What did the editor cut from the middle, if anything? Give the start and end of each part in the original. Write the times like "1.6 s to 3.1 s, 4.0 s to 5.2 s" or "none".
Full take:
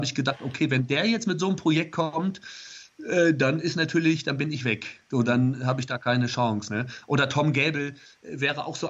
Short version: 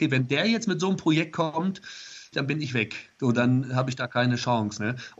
2.9 s to 4.2 s